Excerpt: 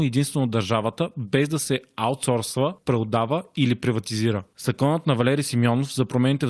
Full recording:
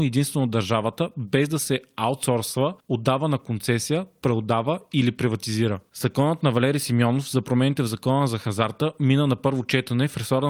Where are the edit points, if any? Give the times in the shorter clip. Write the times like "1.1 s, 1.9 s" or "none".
2.8 s